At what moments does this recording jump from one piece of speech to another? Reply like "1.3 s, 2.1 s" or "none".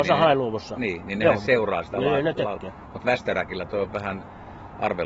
none